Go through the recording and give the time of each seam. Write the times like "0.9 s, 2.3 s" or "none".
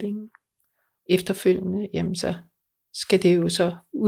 none